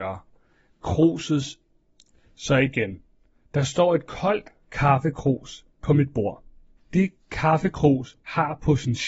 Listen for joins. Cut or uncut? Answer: cut